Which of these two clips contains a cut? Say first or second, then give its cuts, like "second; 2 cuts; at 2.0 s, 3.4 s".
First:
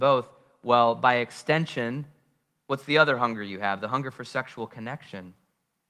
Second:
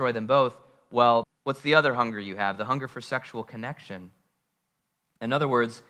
second; 1 cut; at 1.2 s